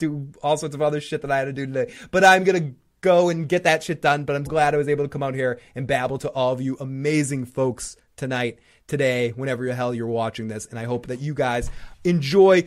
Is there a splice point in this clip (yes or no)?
yes